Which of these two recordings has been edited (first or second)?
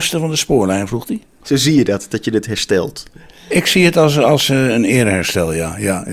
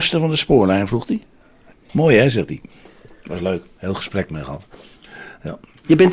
first